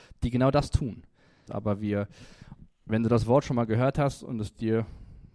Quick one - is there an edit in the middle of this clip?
yes; 1 cut; at 1.5 s

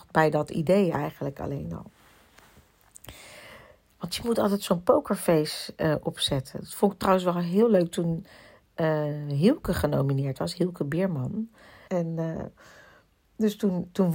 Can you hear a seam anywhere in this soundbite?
yes; 1 cut; at 11.9 s

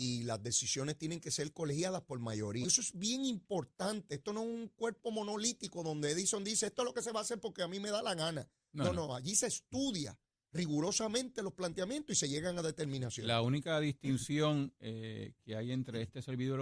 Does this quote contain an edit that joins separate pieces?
yes; 1 cut; at 2.6 s

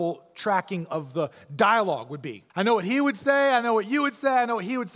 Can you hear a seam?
yes; 1 cut; at 2.5 s

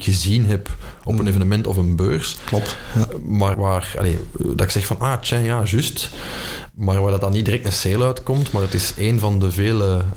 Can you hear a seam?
yes; 1 cut; at 3.5 s

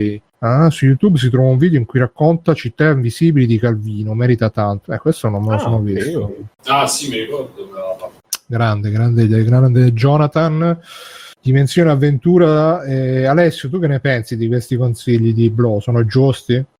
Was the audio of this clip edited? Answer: no; 0 cuts

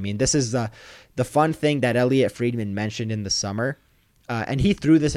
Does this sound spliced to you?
no; 0 cuts

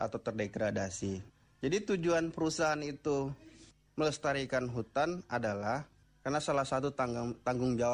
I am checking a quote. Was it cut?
no; 0 cuts

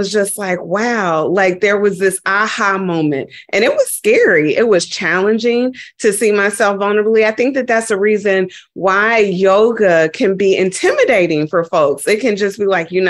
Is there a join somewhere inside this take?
no; 0 cuts

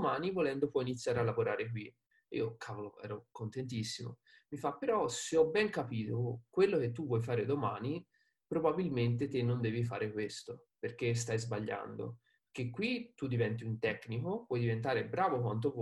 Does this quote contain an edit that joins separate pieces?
no; 0 cuts

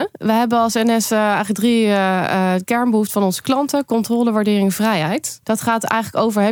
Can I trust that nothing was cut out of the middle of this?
no; 1 cut; at 5.4 s

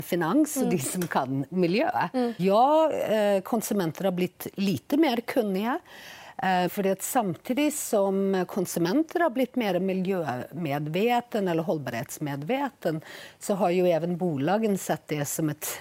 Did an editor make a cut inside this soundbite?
yes; 2 cuts; at 2.4 s, 6.7 s

